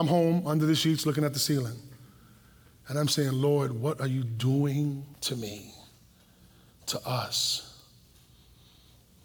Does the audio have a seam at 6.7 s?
no; 1 cut; at 5.1 s

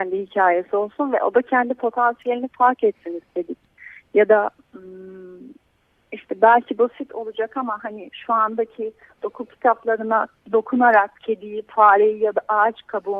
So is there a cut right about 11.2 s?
yes; 1 cut; at 11.2 s

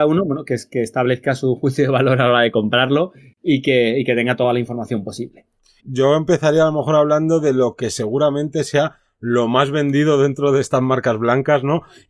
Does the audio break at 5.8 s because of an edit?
yes; 1 cut; at 5.8 s

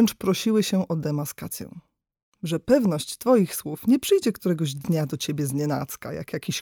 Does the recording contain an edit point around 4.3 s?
no; 1 cut; at 2.2 s

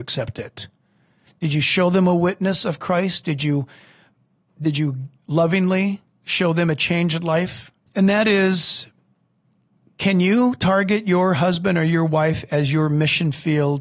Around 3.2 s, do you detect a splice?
no; 3 cuts; at 1.3 s, 5.2 s, 7.9 s

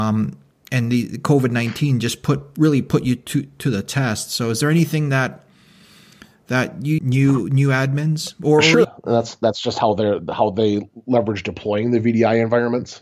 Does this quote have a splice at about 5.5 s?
no; 2 cuts; at 7.0 s, 8.8 s

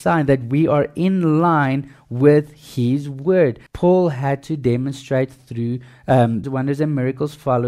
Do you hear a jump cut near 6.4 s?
yes; 2 cuts; at 3.7 s, 6.4 s

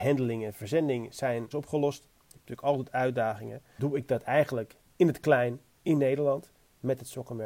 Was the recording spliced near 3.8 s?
yes; 2 cuts; at 1.5 s, 3.8 s

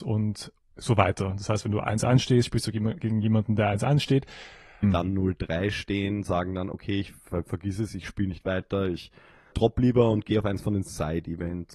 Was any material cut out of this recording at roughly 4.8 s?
yes; 2 cuts; at 4.8 s, 9.5 s

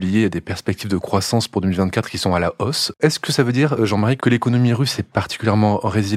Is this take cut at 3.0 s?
yes; 2 cuts; at 3.0 s, 4.2 s

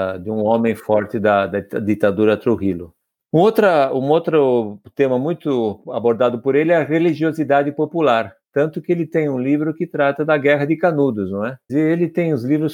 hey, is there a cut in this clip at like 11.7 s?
yes; 1 cut; at 11.7 s

